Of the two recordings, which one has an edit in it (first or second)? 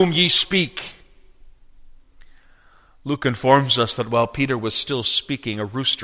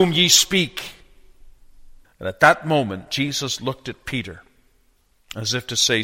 second